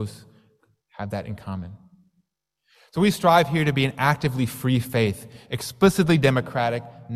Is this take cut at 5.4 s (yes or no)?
no